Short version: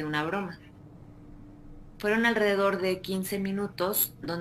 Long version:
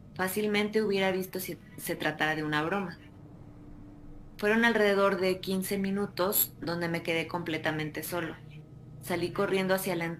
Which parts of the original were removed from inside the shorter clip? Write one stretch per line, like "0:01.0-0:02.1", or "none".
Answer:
none